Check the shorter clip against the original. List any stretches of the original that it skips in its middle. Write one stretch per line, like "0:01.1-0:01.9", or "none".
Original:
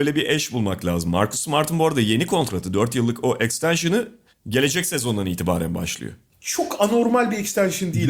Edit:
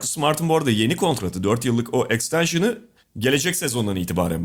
none